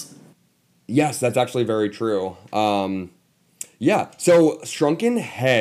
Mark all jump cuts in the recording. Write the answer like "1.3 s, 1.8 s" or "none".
none